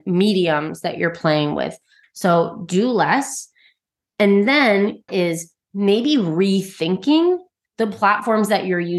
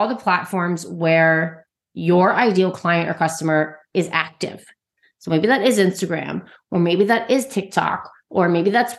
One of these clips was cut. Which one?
first; 2 cuts; at 2.0 s, 5.1 s

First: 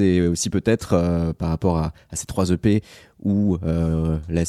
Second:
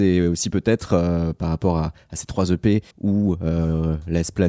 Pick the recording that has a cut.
second; 1 cut; at 2.9 s

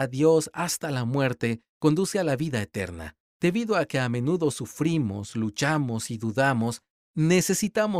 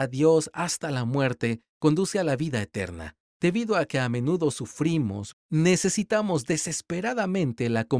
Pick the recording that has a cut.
second; 1 cut; at 5.3 s

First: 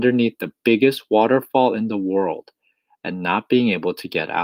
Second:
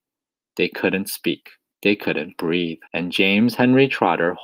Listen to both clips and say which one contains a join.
second; 2 cuts; at 1.7 s, 2.9 s

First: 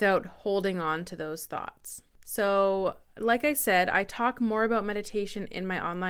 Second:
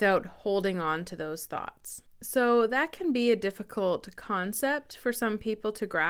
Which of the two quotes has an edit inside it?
second; 1 cut; at 2.1 s

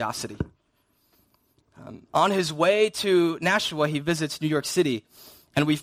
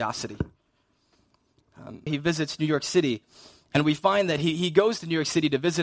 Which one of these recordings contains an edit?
second; 1 cut; at 2.1 s

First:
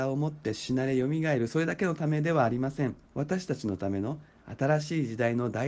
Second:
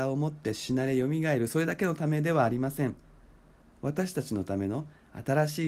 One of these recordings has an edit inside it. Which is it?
first; 1 cut; at 3.0 s

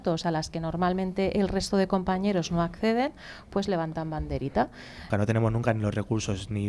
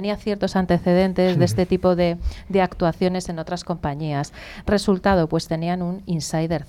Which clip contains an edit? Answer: first; 1 cut; at 5.1 s

